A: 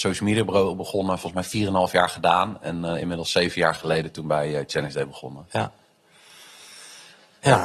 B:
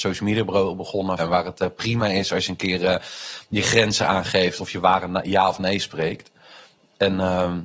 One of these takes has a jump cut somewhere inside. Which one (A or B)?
B